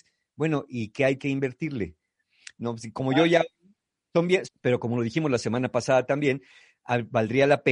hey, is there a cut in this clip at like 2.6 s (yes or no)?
yes